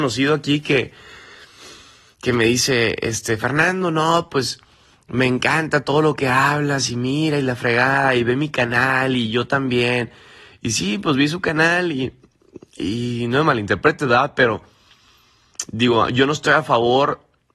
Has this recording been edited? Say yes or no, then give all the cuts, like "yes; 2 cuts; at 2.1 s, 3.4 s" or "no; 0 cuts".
no; 0 cuts